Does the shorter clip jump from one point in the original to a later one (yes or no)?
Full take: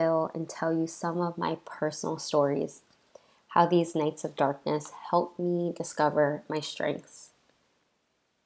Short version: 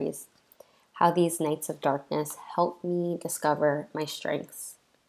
no